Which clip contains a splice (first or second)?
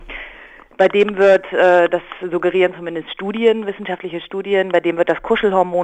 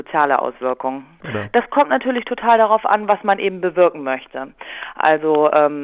second